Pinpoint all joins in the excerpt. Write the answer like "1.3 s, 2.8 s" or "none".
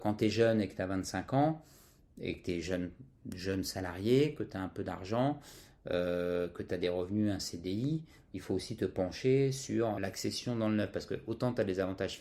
10.0 s